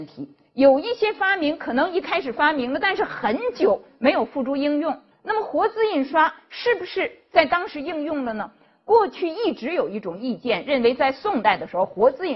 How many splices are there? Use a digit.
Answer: 1